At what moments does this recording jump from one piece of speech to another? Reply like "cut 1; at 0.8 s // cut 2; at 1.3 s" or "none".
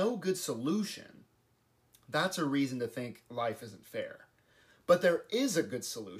none